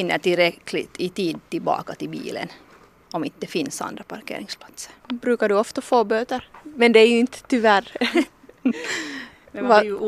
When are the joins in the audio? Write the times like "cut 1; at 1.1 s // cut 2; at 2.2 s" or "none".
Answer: cut 1; at 5.0 s // cut 2; at 6.5 s // cut 3; at 8.3 s